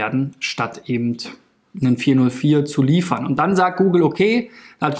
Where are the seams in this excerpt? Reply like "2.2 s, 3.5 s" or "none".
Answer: none